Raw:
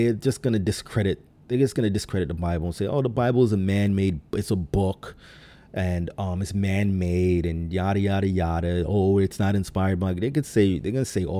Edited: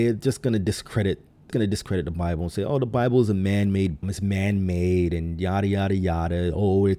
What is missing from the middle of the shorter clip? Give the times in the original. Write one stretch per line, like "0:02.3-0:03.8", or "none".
0:01.5-0:01.7
0:04.3-0:06.4

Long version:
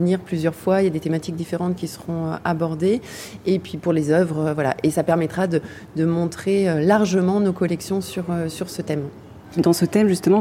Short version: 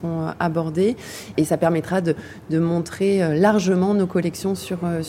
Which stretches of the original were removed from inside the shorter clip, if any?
0:03.4-0:04.8

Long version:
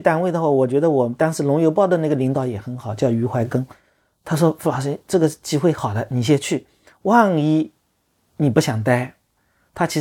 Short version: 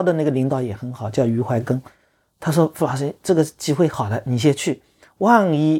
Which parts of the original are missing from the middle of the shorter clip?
none

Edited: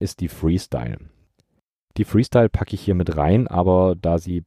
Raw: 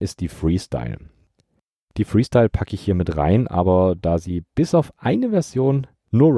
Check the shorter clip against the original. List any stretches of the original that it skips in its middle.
none

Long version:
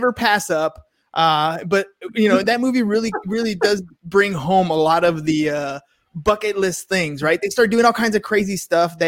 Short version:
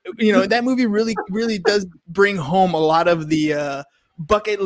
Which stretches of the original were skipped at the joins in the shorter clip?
none

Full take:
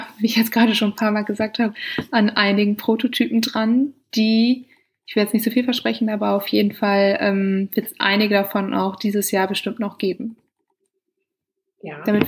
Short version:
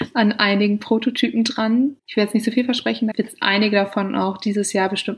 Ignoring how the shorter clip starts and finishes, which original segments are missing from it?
0:04.0-0:05.0
0:06.1-0:07.7

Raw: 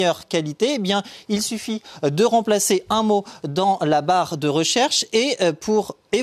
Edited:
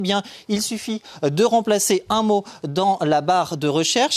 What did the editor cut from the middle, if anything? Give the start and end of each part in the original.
none

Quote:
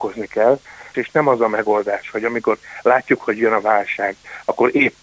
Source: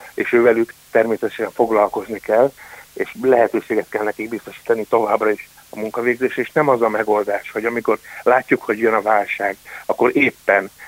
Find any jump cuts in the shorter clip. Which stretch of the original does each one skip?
0:02.9-0:06.4

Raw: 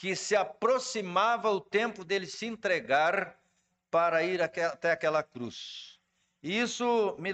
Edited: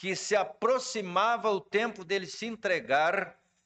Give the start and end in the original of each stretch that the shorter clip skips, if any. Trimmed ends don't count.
none

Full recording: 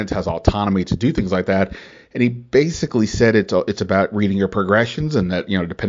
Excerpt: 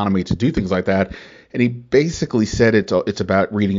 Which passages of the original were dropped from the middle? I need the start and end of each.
none

